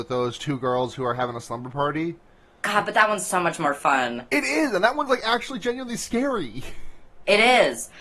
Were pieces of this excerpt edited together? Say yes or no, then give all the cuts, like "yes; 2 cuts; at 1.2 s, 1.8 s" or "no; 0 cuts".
no; 0 cuts